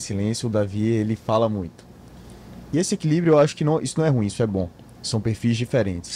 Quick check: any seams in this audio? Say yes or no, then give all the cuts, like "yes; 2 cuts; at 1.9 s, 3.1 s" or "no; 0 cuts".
no; 0 cuts